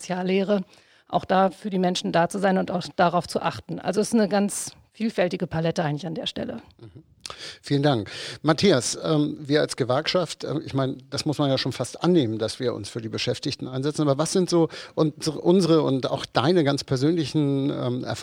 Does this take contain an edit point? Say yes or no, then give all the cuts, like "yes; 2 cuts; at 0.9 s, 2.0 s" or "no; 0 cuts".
no; 0 cuts